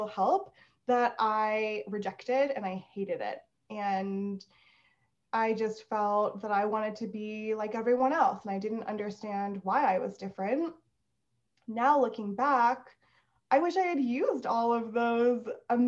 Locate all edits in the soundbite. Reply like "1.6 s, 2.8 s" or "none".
none